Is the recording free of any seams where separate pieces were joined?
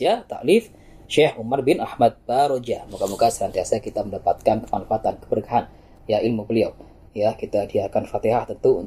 yes; 0 cuts

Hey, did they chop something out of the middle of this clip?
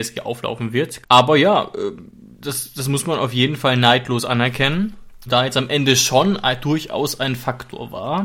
yes; 2 cuts; at 1.0 s, 5.3 s

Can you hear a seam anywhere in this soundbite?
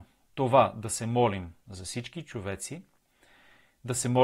no; 0 cuts

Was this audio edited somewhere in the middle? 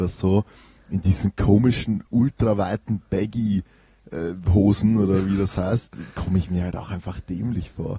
no; 0 cuts

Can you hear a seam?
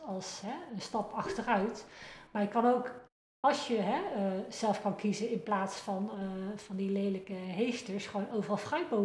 no; 0 cuts

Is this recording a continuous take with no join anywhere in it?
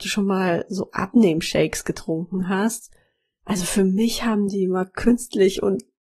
yes; 0 cuts

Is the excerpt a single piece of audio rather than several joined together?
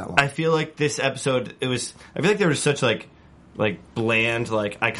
yes; 0 cuts

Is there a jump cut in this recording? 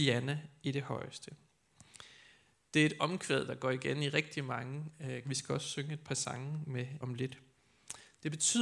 yes; 2 cuts; at 5.2 s, 7.0 s

